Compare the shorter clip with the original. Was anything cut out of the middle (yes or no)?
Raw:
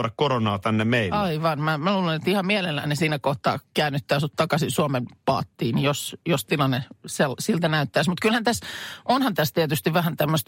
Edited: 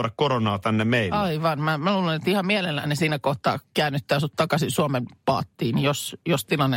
no